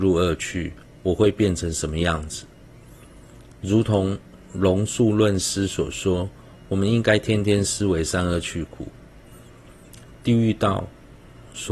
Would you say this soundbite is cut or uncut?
uncut